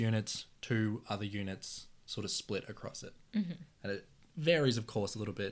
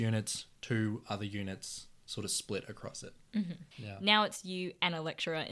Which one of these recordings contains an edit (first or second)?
second